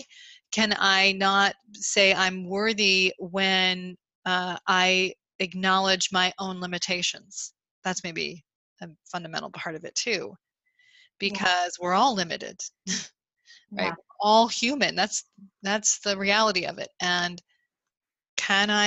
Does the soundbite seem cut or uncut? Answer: uncut